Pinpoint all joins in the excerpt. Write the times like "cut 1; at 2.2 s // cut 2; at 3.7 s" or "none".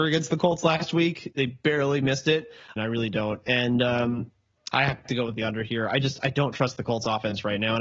cut 1; at 2.8 s // cut 2; at 4.7 s